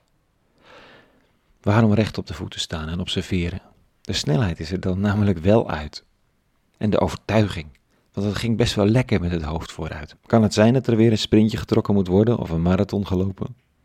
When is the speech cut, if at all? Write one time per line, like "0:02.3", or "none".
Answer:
0:10.2